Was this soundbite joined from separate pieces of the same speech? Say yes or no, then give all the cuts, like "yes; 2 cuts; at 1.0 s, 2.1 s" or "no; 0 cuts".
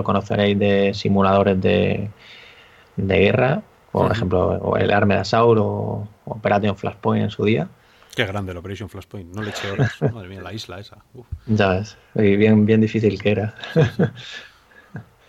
no; 0 cuts